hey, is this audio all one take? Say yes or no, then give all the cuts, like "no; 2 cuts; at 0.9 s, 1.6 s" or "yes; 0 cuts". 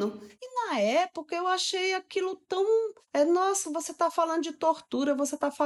yes; 0 cuts